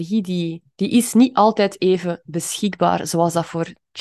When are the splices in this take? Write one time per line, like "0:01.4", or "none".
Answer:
none